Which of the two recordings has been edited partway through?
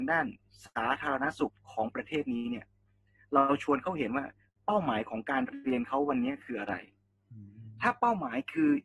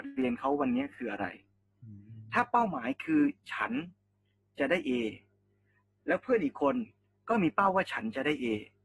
first; 1 cut; at 1.5 s

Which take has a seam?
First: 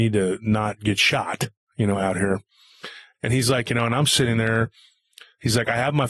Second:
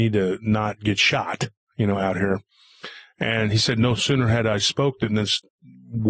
first; 1 cut; at 3.1 s

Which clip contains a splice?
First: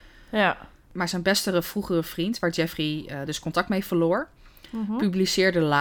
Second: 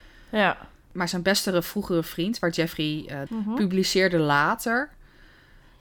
second; 1 cut; at 3.3 s

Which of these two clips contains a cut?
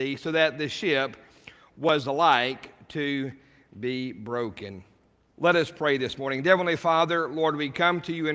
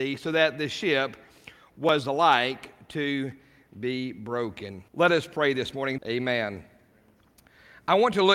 second; 2 cuts; at 4.9 s, 6.0 s

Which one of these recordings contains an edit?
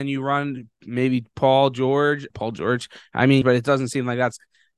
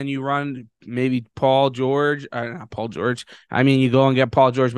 first; 2 cuts; at 2.3 s, 3.4 s

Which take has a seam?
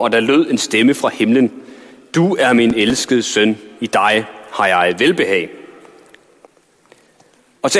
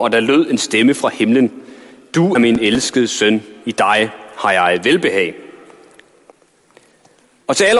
second; 1 cut; at 2.3 s

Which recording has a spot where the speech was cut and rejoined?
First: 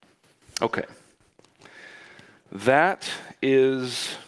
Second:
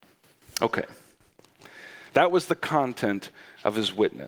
second; 1 cut; at 2.1 s

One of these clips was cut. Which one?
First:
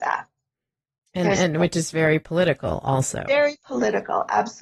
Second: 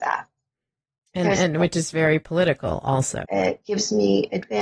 second; 1 cut; at 3.3 s

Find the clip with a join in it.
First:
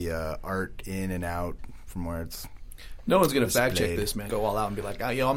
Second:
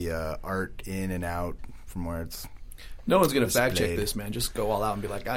first; 1 cut; at 4.3 s

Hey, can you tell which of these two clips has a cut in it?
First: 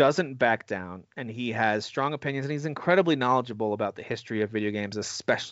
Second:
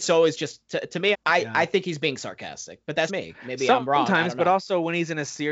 second; 2 cuts; at 1.1 s, 3.1 s

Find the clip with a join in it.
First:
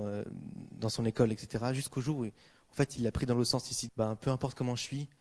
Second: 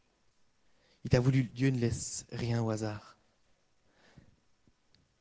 first; 1 cut; at 3.9 s

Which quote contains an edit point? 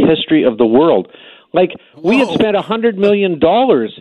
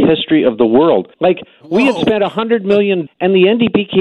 second; 2 cuts; at 1.1 s, 3.1 s

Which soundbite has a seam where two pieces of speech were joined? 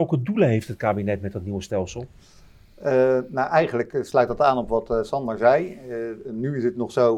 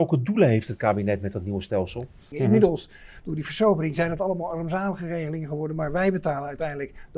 second; 1 cut; at 2.3 s

